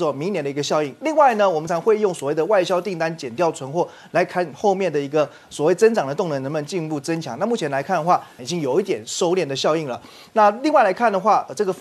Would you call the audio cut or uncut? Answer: cut